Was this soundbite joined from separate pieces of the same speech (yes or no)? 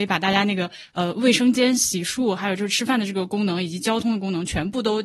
no